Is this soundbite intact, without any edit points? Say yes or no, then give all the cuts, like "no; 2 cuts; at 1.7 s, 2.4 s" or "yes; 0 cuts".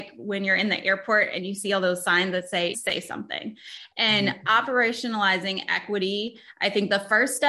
no; 1 cut; at 2.7 s